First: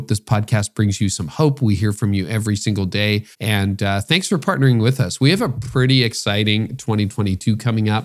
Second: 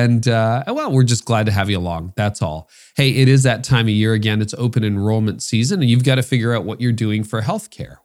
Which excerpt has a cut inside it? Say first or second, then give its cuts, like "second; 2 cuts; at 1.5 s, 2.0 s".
first; 1 cut; at 3.3 s